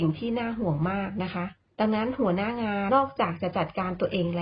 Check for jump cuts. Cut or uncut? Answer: cut